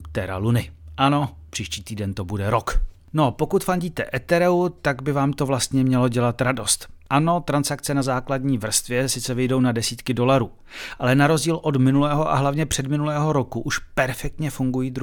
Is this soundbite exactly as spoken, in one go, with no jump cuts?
yes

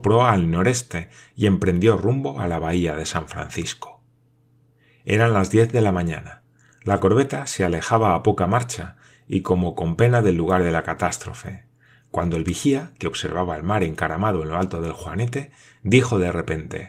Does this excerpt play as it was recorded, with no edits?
yes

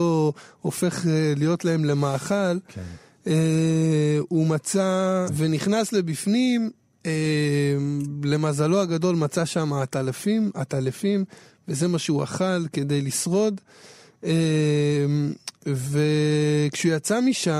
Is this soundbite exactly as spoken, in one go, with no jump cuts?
no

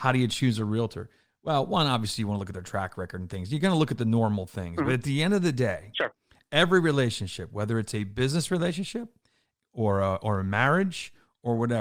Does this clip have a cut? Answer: no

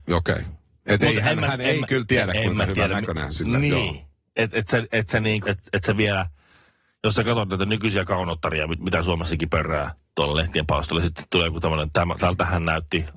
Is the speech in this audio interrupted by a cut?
yes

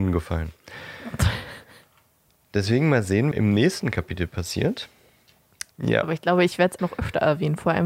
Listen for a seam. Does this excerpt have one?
yes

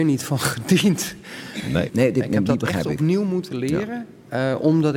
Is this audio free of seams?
no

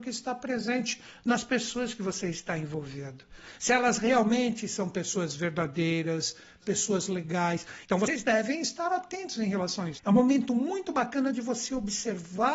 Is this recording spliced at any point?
yes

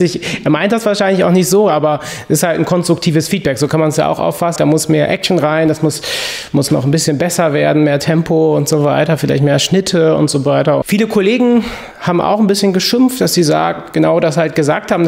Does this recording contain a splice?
yes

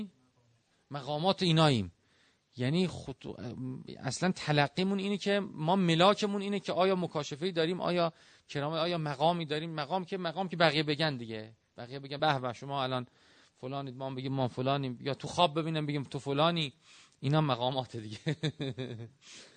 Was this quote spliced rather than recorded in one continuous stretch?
no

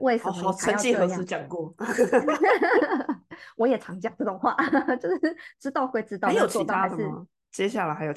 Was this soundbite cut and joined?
no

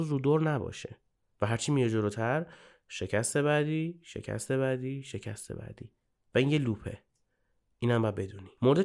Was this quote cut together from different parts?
no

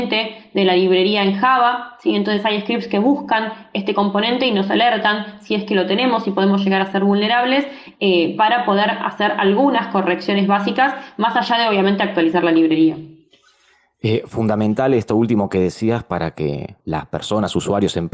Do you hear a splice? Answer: yes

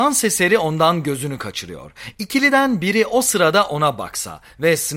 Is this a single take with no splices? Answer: yes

